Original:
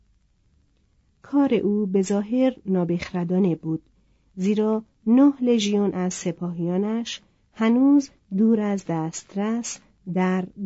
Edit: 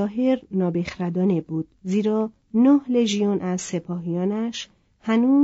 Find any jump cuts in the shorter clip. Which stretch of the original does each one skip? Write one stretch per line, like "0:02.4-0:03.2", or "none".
0:03.9-0:04.3